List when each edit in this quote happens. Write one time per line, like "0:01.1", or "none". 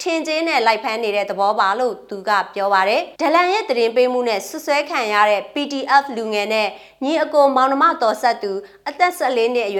0:03.1